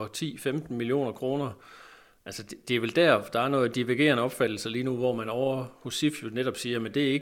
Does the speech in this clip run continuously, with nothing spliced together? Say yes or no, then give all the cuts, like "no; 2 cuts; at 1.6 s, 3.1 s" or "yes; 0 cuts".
no; 1 cut; at 2.6 s